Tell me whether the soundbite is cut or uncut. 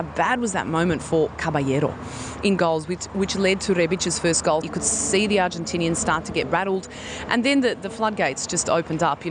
cut